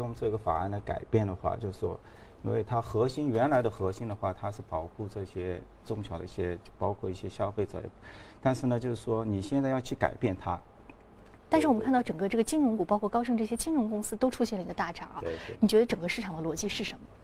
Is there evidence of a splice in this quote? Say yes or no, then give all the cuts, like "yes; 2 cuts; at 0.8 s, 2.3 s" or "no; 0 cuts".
yes; 1 cut; at 11.4 s